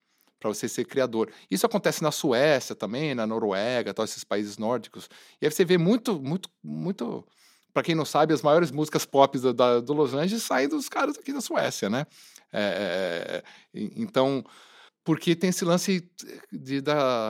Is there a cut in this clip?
no; 0 cuts

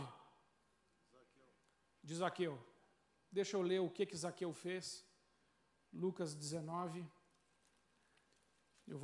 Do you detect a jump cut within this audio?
no; 0 cuts

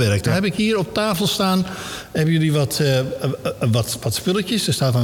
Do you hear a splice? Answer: no; 0 cuts

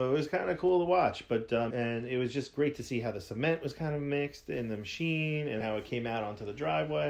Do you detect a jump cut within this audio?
yes; 2 cuts; at 1.7 s, 5.6 s

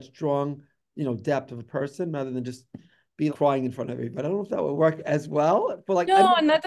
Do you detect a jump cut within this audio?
yes; 1 cut; at 3.3 s

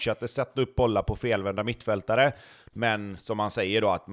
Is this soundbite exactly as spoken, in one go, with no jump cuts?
no; 1 cut; at 2.7 s

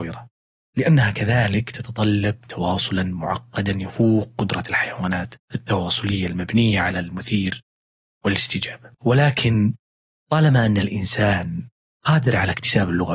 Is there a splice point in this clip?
yes; 1 cut; at 8.9 s

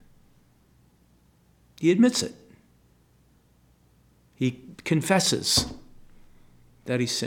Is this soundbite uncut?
yes; 0 cuts

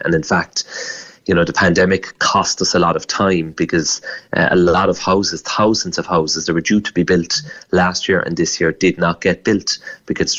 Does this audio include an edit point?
no; 0 cuts

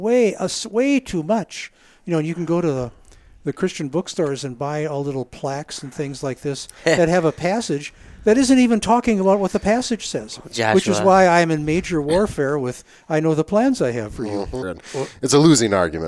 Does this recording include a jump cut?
yes; 1 cut; at 14.6 s

